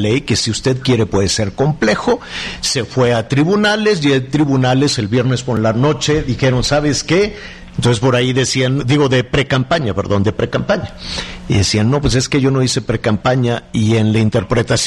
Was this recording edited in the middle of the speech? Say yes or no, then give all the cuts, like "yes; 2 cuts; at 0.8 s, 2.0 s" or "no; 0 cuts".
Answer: yes; 2 cuts; at 7.7 s, 8.8 s